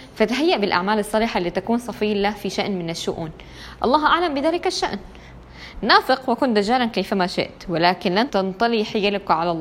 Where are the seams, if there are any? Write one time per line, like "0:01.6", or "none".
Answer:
0:08.3